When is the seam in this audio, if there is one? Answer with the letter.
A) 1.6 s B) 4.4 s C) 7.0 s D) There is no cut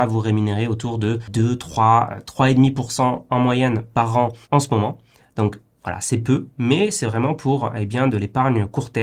B